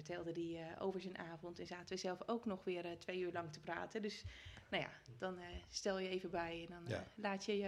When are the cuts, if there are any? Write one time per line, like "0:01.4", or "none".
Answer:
none